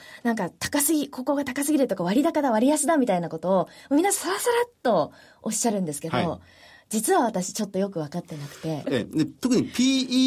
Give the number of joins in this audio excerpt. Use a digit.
1